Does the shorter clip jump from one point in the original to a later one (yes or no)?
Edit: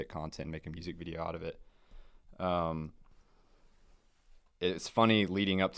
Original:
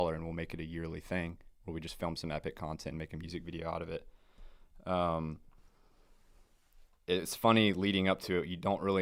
no